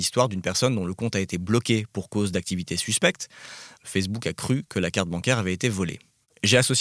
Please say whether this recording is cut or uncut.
cut